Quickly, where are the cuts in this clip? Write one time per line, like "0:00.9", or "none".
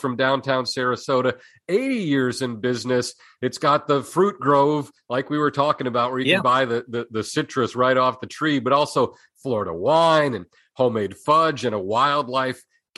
none